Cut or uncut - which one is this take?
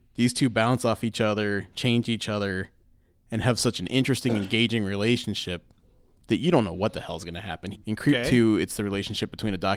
cut